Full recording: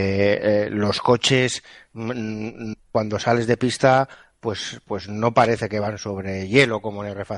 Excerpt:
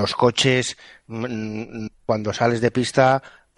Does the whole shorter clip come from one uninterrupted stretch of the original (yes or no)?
yes